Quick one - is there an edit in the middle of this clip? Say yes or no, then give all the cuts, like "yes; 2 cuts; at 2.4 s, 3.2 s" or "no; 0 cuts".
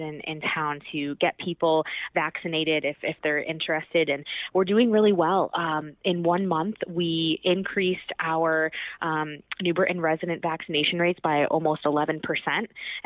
no; 0 cuts